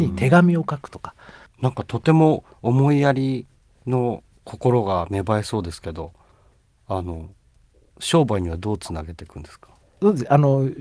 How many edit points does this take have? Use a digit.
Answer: 1